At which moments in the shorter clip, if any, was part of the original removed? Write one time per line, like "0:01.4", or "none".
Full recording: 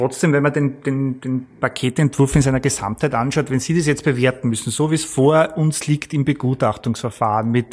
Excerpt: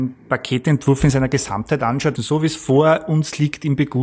0:02.2